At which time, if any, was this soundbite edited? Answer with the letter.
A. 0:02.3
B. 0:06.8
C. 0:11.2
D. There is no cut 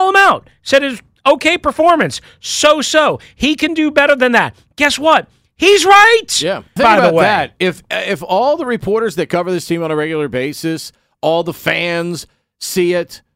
B